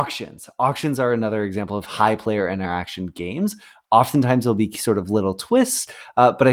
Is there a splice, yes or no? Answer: no